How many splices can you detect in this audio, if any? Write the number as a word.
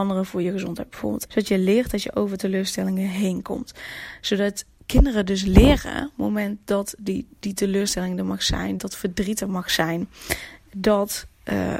two